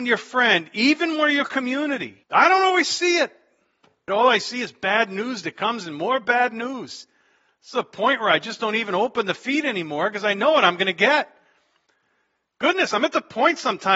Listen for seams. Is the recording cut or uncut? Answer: cut